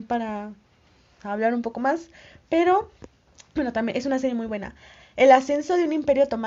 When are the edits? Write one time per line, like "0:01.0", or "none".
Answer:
none